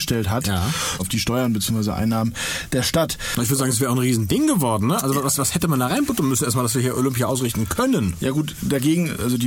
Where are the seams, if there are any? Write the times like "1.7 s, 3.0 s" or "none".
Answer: 1.0 s